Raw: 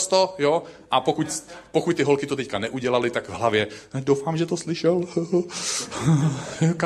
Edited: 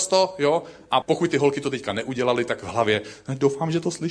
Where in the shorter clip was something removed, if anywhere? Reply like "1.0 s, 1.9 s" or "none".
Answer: 1.0 s